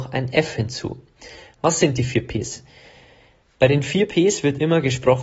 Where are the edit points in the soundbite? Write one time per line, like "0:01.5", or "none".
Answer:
none